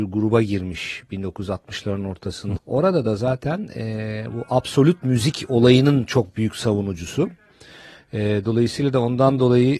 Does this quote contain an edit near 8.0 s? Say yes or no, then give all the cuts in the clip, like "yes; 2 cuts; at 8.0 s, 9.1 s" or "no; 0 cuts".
no; 1 cut; at 2.6 s